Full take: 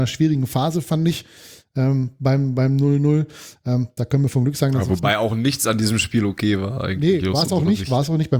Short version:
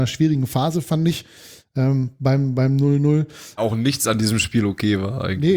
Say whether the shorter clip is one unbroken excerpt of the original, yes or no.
no